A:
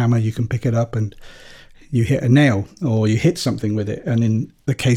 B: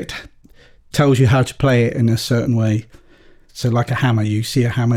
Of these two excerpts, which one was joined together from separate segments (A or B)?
B